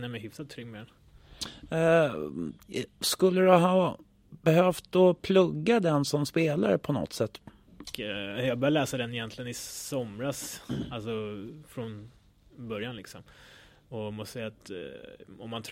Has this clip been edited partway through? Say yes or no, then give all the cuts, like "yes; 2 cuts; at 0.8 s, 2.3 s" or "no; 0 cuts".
yes; 1 cut; at 7.9 s